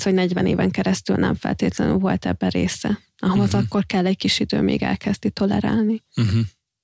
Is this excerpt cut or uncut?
uncut